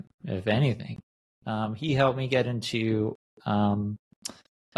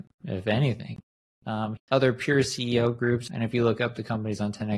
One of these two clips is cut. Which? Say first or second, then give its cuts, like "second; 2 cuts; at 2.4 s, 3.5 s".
second; 2 cuts; at 1.8 s, 3.3 s